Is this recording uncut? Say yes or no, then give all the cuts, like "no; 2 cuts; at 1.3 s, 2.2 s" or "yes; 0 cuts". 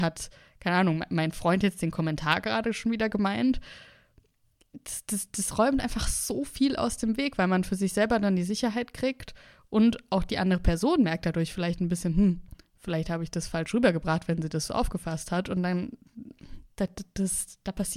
yes; 0 cuts